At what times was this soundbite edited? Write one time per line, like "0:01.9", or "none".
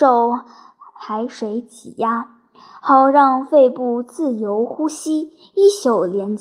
none